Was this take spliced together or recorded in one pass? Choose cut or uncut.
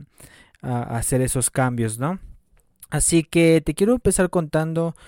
uncut